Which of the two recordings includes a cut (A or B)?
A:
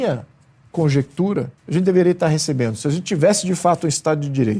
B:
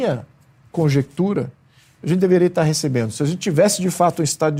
A